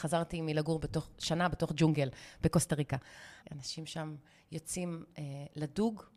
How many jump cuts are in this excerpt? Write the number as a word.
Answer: one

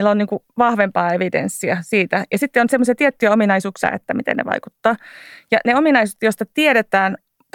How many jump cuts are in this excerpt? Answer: one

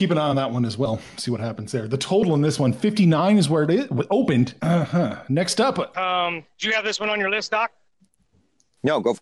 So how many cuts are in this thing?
two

